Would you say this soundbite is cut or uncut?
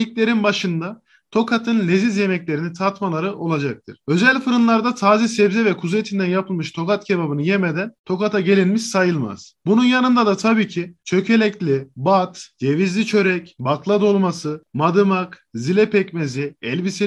cut